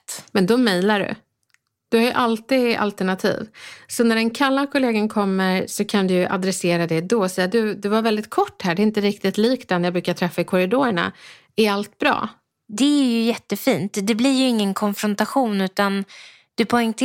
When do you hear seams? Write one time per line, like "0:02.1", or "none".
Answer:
none